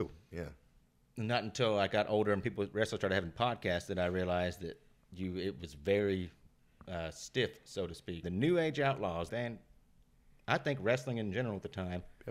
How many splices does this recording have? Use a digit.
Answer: 2